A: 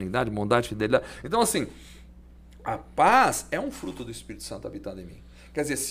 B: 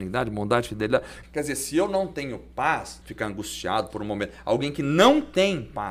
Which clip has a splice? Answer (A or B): B